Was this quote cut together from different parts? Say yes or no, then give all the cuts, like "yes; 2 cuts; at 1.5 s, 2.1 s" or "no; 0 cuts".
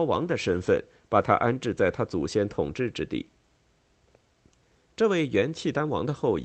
no; 0 cuts